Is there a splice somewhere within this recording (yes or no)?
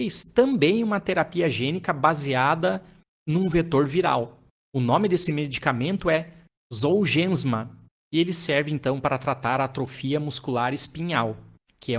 no